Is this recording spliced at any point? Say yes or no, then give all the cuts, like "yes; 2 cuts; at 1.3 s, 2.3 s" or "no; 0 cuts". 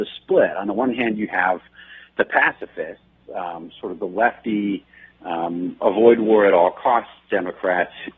no; 0 cuts